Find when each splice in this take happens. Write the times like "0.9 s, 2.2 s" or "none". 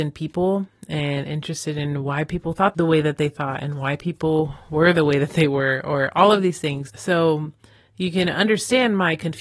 6.9 s